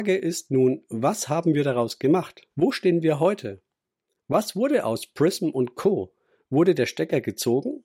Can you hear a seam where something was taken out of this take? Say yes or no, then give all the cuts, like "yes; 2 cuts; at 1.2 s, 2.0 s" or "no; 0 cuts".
yes; 1 cut; at 2.5 s